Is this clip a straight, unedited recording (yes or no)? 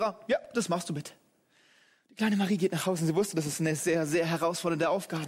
no